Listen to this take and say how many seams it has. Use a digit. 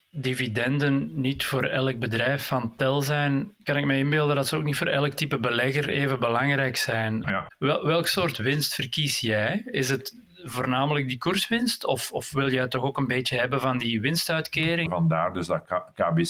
2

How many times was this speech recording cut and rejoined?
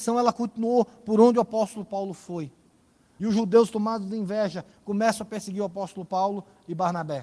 1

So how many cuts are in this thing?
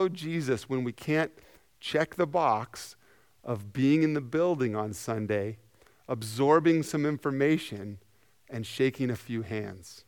0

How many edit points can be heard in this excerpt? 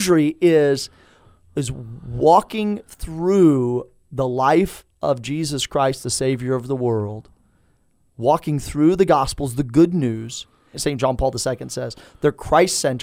1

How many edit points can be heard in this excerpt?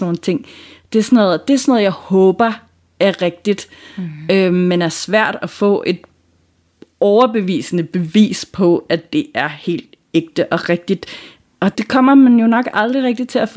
1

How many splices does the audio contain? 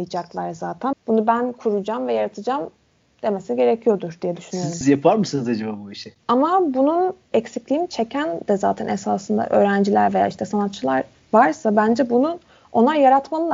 2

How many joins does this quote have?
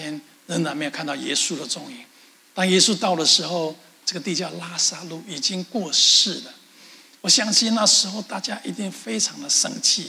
2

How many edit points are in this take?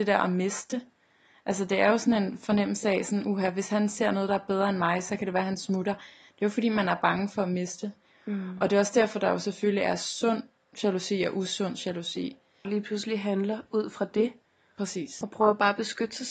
2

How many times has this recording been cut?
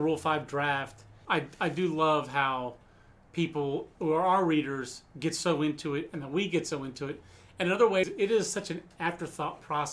2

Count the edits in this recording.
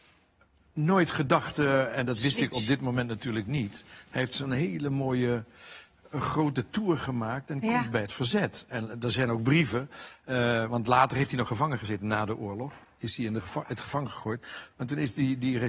0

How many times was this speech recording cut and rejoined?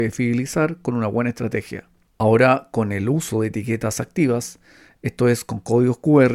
1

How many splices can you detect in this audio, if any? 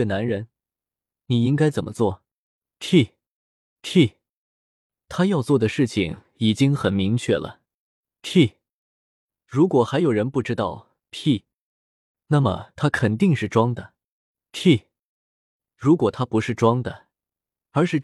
1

